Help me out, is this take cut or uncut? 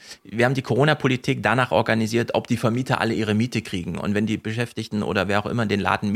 uncut